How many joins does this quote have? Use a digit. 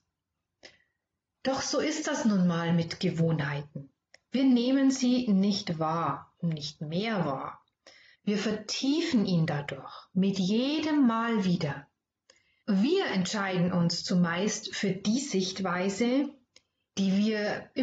2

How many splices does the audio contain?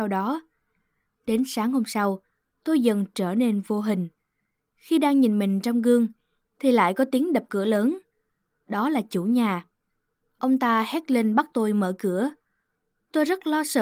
1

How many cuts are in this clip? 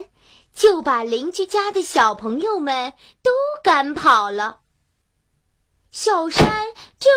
0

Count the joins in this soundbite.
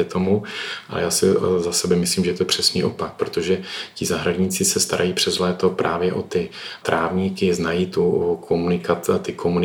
0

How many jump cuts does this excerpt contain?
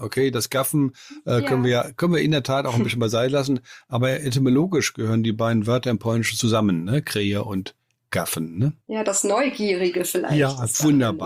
0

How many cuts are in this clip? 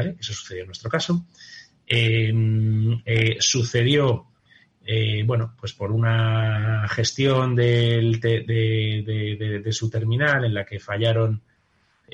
0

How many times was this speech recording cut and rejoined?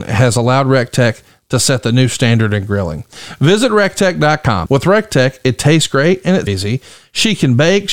2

